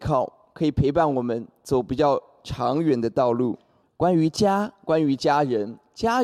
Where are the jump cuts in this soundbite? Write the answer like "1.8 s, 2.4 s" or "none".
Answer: 3.8 s